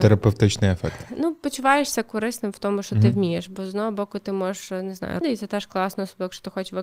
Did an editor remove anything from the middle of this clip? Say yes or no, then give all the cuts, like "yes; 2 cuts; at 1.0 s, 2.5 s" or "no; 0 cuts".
yes; 1 cut; at 5.2 s